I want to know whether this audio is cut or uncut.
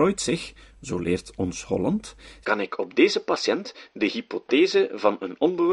cut